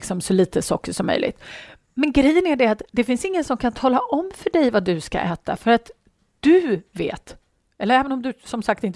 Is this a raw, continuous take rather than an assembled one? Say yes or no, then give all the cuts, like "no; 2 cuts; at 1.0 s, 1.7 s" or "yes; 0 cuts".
yes; 0 cuts